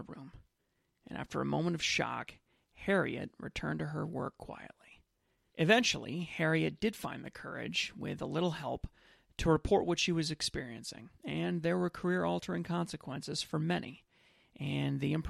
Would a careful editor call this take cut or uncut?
cut